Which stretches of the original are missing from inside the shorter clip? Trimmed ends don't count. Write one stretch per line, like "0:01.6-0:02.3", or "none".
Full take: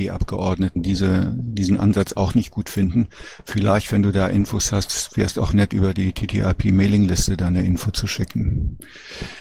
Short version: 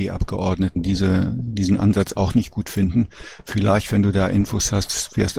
none

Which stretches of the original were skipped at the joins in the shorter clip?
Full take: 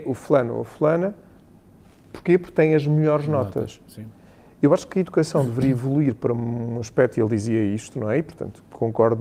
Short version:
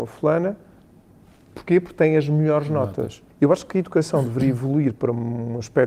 0:03.9-0:04.5

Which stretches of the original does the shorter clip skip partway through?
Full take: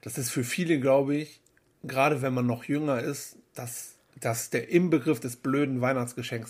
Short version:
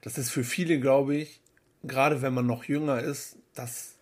none

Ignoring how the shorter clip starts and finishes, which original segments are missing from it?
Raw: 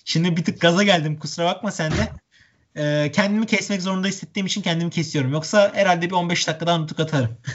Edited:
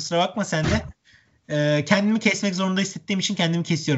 none

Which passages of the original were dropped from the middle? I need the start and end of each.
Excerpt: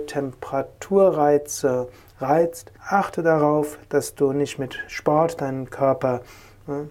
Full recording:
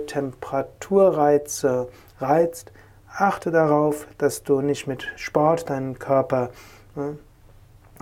0:02.8-0:03.1

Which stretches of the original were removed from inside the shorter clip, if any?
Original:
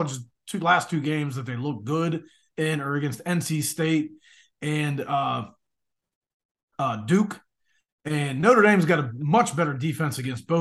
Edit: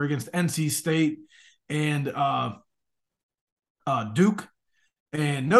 none

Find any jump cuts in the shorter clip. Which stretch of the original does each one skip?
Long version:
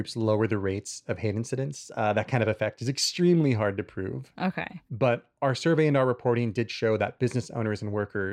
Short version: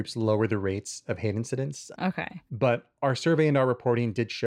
0:01.9-0:04.3

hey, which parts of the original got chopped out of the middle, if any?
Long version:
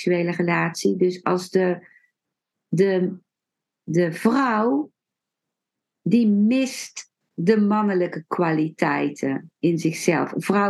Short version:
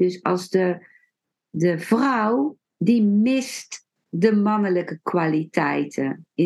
0:02.4-0:03.8
0:05.0-0:05.9

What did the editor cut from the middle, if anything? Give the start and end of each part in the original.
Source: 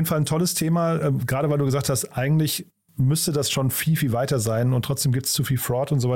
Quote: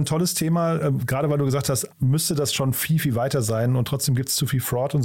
0:02.1-0:02.9

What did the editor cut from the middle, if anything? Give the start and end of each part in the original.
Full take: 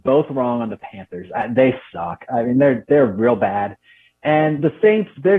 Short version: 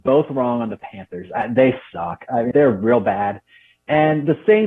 0:02.5-0:02.9

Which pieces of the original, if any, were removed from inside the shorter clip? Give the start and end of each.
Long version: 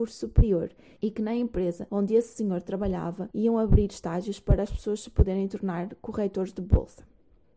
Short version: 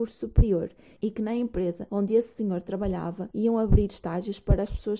none

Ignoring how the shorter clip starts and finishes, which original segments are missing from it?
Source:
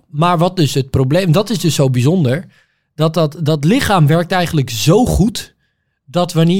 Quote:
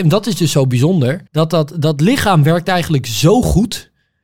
0:02.5-0:02.9

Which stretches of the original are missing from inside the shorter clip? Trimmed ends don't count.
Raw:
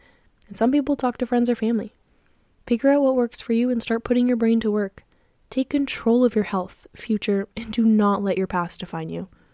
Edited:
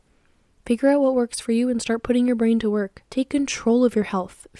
0:05.1-0:05.5

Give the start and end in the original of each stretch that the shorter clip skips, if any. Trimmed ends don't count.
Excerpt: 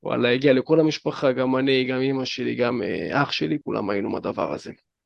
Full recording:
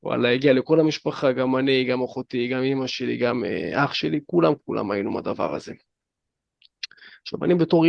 0:01.9-0:02.5
0:04.2-0:04.6

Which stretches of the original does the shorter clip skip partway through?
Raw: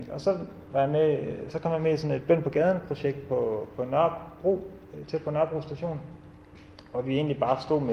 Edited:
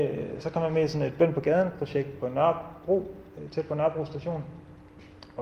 0:03.3-0:03.7

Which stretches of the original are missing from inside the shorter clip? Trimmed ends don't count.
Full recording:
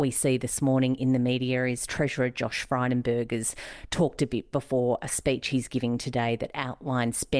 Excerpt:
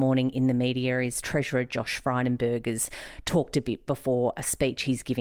none

